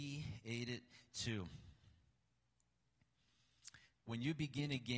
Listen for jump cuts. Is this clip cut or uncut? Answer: cut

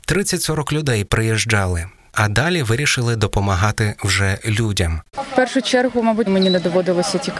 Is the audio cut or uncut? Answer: cut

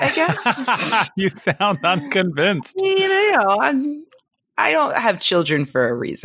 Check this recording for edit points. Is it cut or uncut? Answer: uncut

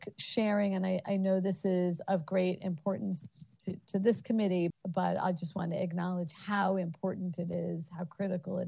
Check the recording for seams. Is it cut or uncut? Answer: cut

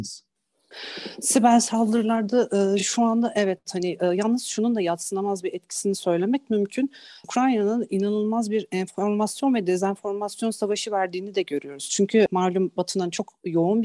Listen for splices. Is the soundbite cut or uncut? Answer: uncut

